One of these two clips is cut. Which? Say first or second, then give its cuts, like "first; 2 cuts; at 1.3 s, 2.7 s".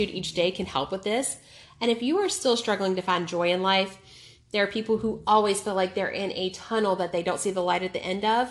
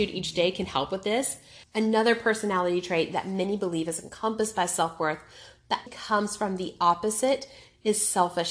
second; 2 cuts; at 1.6 s, 5.9 s